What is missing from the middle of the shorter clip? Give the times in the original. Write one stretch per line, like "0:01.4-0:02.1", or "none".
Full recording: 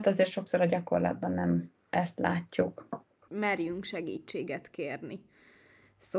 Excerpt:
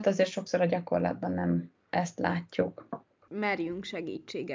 none